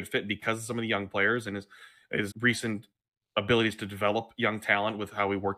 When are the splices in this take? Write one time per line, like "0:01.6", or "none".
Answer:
0:02.3

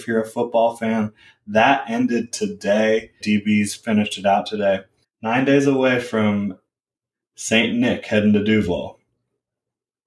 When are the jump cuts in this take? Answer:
0:03.2
0:05.0

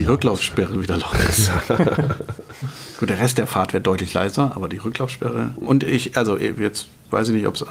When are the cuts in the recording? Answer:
0:05.7

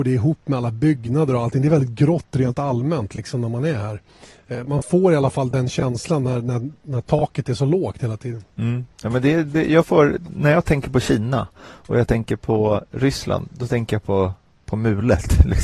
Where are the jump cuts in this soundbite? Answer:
none

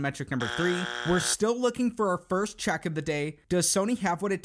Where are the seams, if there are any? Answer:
none

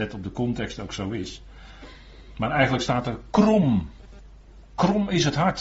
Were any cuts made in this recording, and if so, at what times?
none

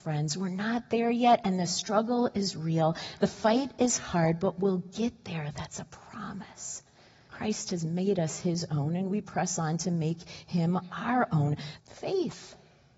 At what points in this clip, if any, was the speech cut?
0:07.3
0:11.8

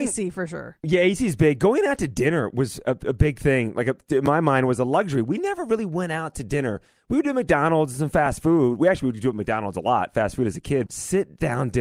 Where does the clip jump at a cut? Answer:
0:10.9

